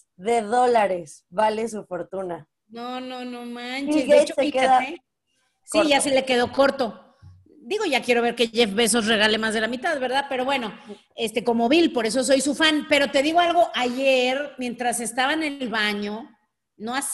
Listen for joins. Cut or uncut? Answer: uncut